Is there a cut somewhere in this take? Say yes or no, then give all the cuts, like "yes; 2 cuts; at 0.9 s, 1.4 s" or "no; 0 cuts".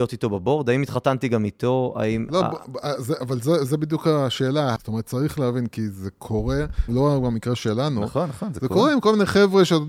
yes; 2 cuts; at 4.8 s, 6.9 s